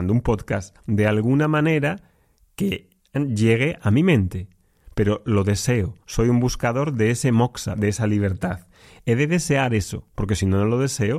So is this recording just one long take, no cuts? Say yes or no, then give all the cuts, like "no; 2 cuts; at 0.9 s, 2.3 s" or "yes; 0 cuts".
yes; 0 cuts